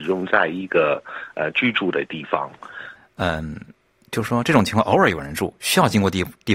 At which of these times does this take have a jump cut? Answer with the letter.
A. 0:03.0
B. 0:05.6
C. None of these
A